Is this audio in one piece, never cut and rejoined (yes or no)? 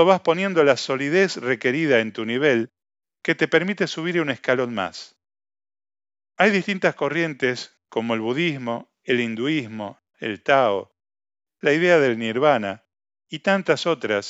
no